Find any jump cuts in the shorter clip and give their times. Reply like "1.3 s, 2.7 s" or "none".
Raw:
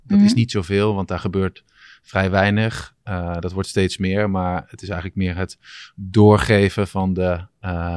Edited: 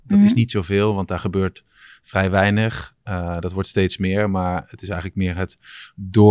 none